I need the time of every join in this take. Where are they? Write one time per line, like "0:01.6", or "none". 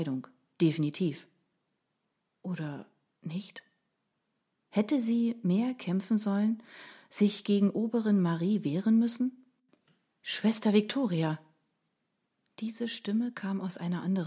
none